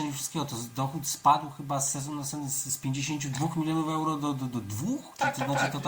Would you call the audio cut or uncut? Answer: uncut